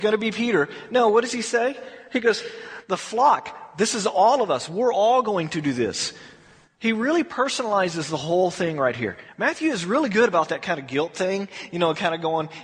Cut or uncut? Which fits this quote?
uncut